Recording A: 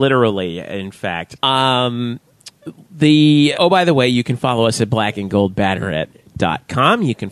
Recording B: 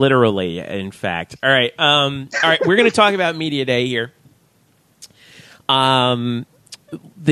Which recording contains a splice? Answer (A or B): A